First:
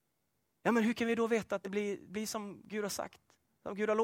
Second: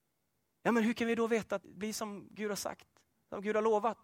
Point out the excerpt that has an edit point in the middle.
second; 1 cut; at 1.6 s

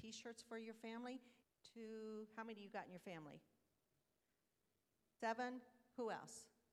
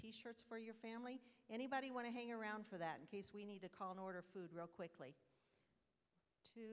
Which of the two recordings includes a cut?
first; 2 cuts; at 1.4 s, 5.2 s

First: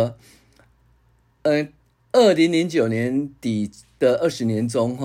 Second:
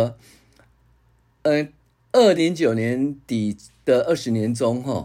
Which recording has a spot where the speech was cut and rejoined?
second; 1 cut; at 2.4 s

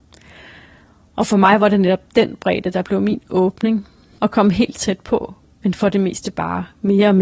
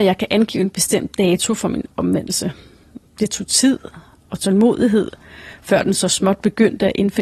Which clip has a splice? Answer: first; 2 cuts; at 4.2 s, 5.4 s

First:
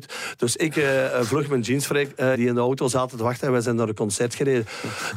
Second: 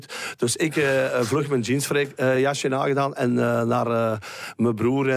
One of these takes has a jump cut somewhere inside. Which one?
first; 1 cut; at 2.3 s

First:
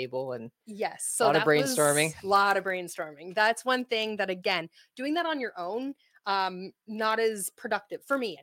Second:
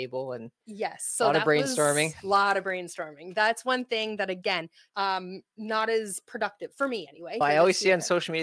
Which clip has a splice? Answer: second; 2 cuts; at 4.9 s, 7.4 s

